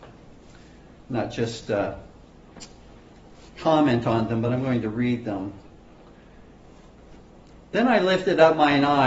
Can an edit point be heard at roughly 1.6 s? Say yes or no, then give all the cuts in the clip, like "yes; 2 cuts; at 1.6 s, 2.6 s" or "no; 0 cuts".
no; 0 cuts